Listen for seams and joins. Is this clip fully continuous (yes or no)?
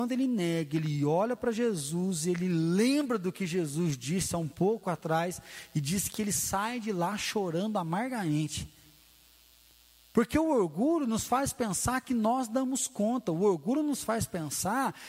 no